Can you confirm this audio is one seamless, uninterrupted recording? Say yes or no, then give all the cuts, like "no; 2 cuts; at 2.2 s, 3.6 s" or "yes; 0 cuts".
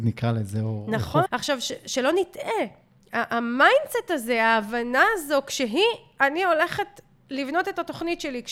no; 1 cut; at 1.3 s